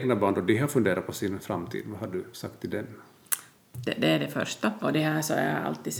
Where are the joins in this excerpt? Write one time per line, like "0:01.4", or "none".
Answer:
0:03.5
0:04.8